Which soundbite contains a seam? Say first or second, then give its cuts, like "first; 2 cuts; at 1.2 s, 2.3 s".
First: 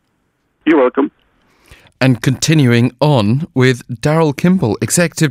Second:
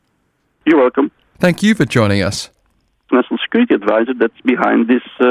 second; 2 cuts; at 1.4 s, 3.1 s